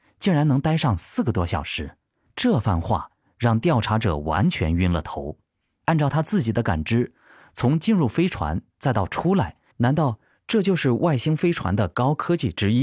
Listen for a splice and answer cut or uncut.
cut